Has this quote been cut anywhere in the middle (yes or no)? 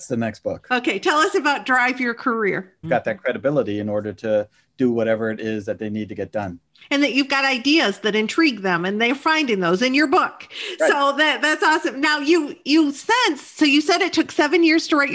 yes